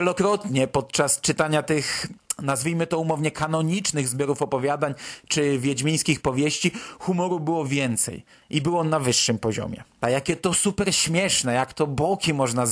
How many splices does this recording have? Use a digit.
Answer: 1